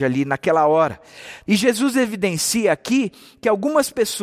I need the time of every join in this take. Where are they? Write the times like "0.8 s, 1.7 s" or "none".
1.5 s